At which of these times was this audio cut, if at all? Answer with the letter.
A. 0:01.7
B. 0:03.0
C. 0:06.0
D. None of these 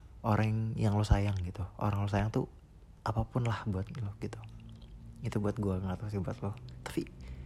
B